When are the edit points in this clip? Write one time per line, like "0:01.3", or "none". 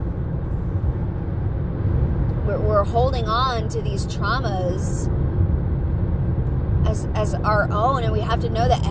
none